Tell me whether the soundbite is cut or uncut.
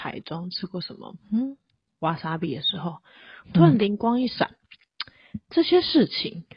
uncut